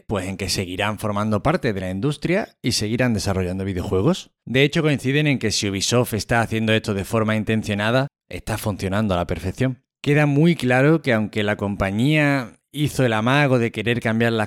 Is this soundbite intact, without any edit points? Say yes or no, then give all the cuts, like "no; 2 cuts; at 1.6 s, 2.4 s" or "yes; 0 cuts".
no; 1 cut; at 4.4 s